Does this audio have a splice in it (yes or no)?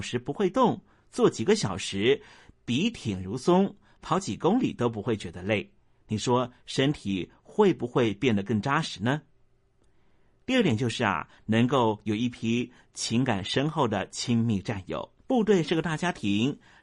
yes